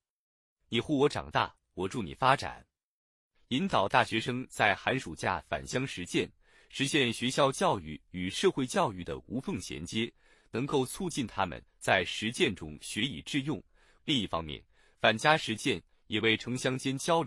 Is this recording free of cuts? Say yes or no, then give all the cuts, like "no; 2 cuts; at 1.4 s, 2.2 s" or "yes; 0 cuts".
no; 1 cut; at 14.0 s